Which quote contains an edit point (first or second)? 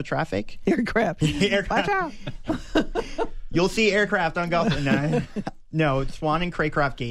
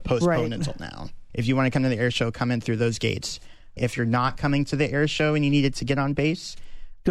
second